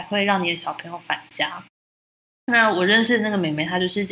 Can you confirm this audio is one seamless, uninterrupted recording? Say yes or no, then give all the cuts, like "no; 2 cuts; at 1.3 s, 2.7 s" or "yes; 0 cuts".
yes; 0 cuts